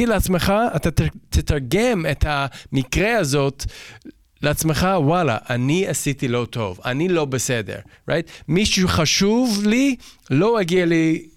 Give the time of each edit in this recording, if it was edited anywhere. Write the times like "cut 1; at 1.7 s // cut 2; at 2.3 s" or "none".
none

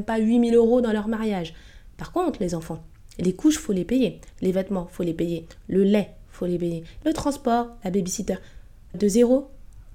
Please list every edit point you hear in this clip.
cut 1; at 7.0 s // cut 2; at 8.9 s

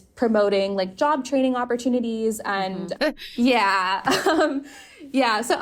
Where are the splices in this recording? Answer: cut 1; at 3.0 s

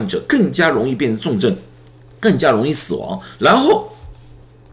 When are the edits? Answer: cut 1; at 3.4 s

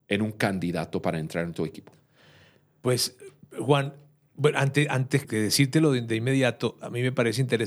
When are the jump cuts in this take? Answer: cut 1; at 5.2 s

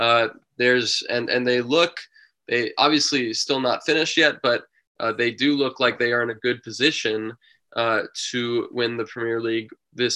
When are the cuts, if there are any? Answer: none

